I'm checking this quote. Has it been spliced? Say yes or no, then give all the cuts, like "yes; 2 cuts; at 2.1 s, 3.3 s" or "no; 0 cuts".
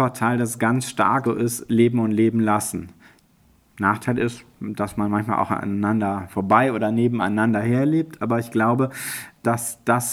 yes; 1 cut; at 1.3 s